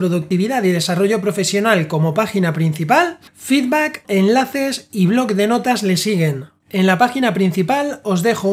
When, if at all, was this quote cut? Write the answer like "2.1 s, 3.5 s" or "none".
4.0 s

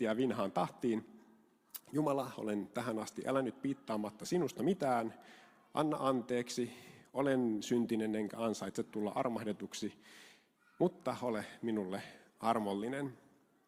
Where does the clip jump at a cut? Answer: none

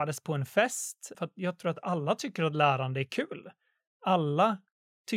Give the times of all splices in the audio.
1.1 s

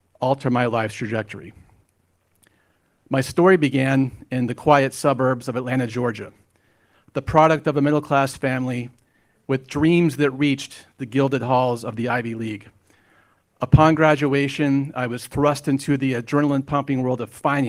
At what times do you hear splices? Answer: none

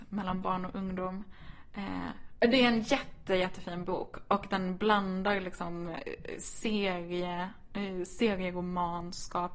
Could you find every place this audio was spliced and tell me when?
2.4 s

